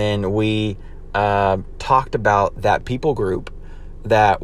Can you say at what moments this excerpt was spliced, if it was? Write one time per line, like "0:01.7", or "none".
none